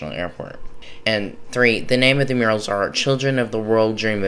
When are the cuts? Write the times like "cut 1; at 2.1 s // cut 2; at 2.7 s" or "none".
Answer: cut 1; at 1.0 s